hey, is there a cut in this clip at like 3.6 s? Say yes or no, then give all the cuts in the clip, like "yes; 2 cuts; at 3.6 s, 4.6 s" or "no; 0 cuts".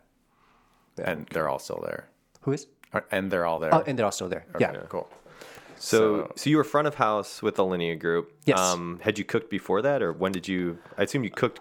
yes; 1 cut; at 3.6 s